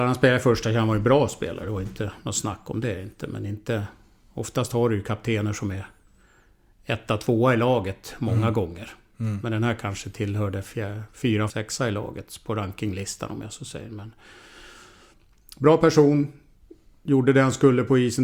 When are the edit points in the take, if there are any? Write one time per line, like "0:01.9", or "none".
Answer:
0:11.5